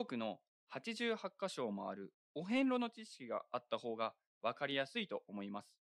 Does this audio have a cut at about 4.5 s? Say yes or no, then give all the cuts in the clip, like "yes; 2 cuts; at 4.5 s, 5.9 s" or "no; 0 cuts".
no; 0 cuts